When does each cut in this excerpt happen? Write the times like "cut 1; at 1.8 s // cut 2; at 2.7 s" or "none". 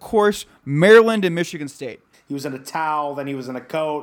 cut 1; at 2.1 s